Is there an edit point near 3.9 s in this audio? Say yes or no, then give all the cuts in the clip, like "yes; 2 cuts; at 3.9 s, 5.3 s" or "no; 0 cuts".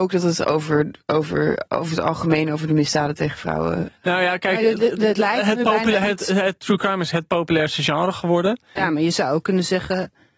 no; 1 cut; at 8.8 s